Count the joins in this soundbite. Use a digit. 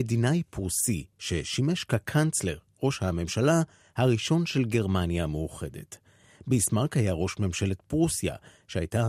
0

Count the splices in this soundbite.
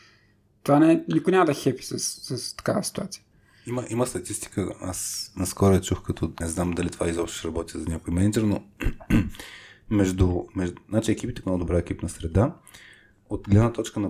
2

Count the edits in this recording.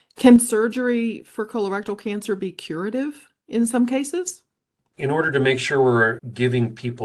1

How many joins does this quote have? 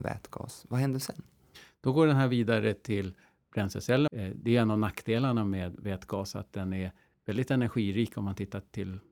1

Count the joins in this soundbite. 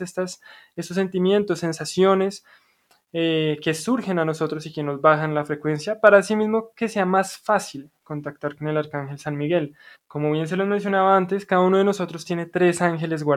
1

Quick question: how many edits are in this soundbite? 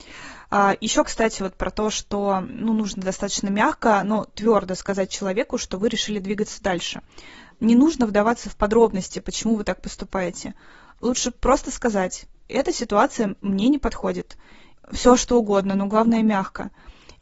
1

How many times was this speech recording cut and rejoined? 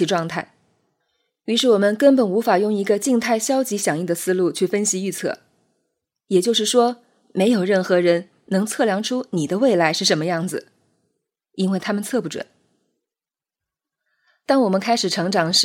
0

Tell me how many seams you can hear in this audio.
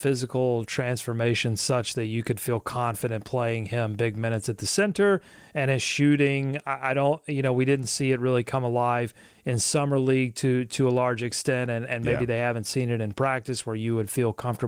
0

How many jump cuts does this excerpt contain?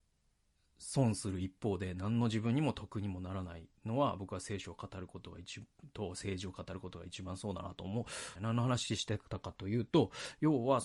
1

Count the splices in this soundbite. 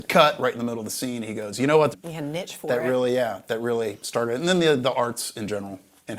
1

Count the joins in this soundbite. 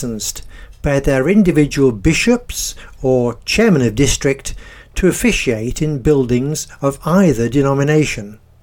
0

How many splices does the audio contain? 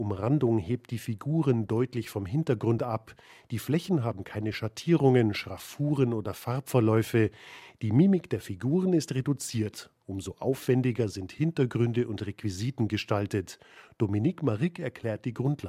0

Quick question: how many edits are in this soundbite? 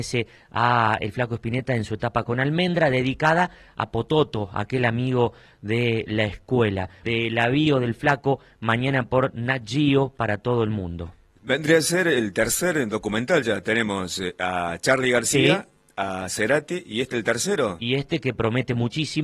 1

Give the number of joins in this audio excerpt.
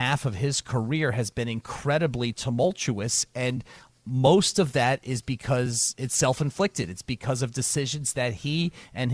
0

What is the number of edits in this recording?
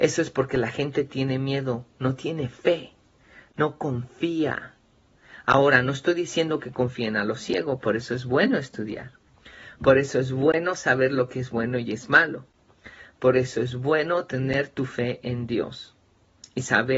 0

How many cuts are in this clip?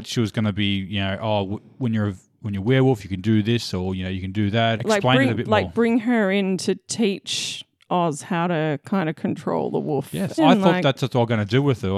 2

